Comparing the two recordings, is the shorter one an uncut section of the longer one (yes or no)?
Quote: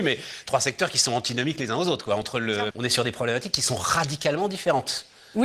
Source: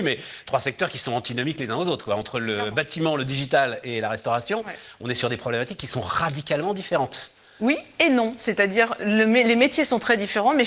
no